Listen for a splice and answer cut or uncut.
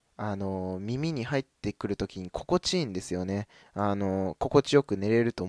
cut